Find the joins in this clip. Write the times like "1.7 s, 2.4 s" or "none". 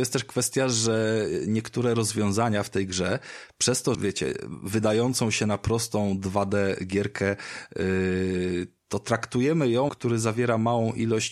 3.9 s, 9.9 s